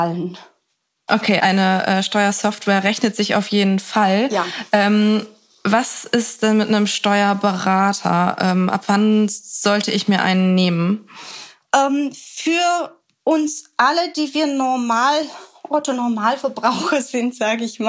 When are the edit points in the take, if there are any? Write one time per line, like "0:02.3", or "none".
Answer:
0:01.4